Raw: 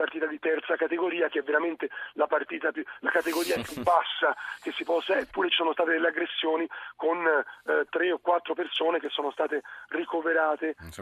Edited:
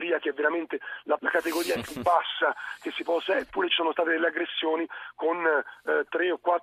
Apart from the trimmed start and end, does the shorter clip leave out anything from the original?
yes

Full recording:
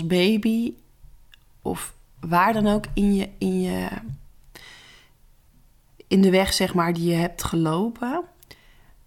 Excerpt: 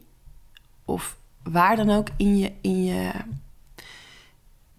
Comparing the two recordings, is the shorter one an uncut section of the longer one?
yes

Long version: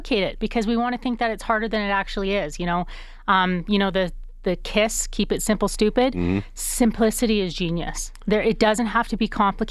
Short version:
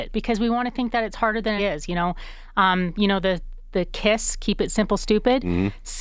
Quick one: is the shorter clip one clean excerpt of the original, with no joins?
no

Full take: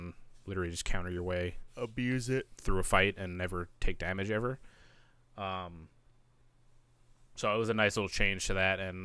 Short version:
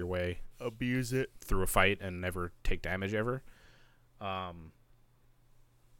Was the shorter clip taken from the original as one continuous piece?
yes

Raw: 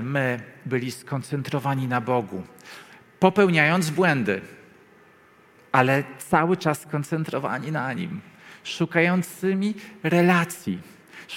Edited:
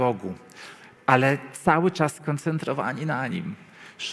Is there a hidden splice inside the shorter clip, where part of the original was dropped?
yes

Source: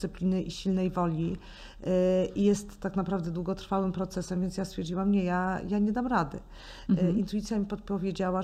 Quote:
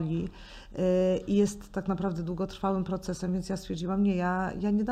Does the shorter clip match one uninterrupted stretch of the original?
yes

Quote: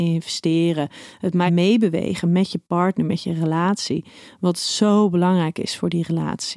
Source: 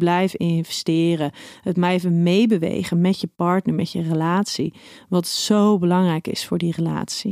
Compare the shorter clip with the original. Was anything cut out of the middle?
yes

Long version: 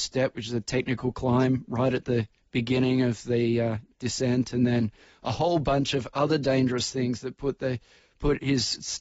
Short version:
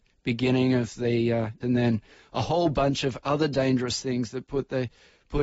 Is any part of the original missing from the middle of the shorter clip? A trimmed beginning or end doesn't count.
yes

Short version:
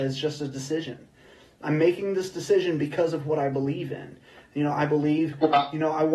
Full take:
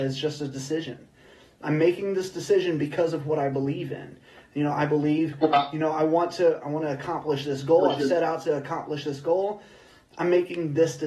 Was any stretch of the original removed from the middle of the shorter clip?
no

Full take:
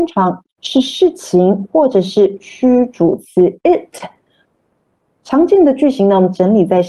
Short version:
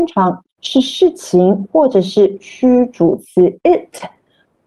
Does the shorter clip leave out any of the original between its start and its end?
no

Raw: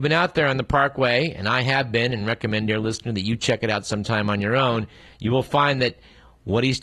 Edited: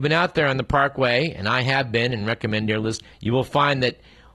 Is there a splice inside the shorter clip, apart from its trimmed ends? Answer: yes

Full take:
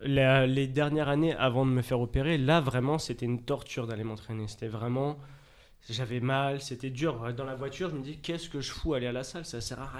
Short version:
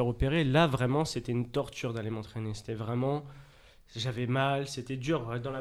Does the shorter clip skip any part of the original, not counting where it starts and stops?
no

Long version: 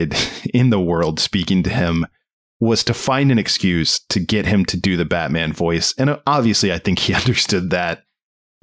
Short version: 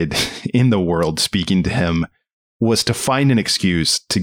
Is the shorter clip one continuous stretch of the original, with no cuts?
yes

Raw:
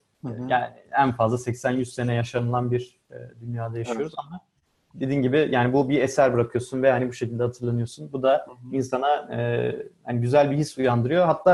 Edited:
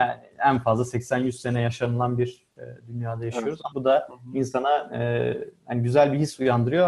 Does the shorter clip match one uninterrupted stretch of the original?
no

